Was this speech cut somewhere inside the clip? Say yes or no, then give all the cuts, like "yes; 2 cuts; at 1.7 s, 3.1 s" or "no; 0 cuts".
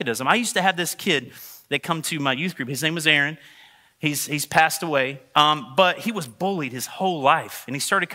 no; 0 cuts